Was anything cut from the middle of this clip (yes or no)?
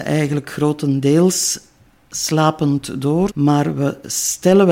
yes